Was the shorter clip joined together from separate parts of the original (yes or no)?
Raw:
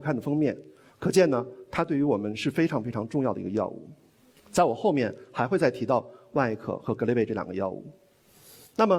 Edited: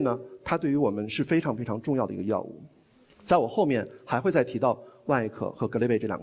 no